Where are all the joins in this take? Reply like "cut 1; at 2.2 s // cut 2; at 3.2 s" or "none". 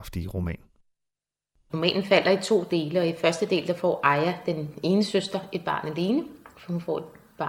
cut 1; at 1.7 s

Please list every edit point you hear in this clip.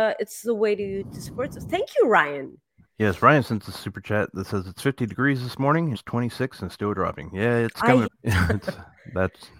cut 1; at 5.9 s // cut 2; at 8.0 s

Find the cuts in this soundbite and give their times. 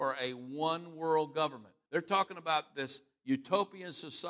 cut 1; at 1.9 s

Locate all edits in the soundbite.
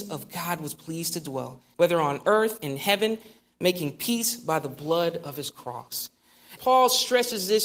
cut 1; at 1.7 s // cut 2; at 6.6 s

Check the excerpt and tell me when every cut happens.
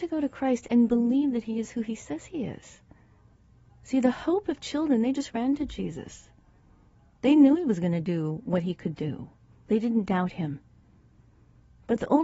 cut 1; at 3.7 s

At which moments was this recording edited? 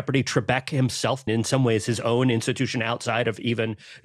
cut 1; at 1.3 s

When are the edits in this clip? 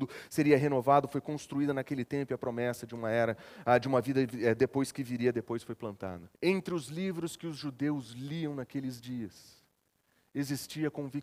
cut 1; at 6.3 s

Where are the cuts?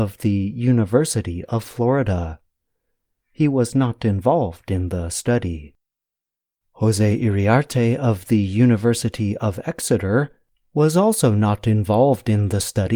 none

